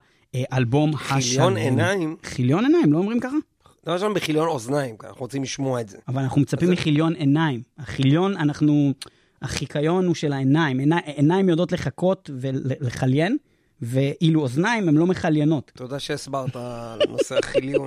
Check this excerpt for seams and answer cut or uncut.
uncut